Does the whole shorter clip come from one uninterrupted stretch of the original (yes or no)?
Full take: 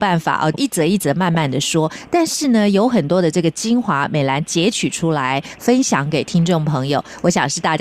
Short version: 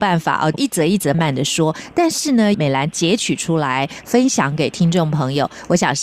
no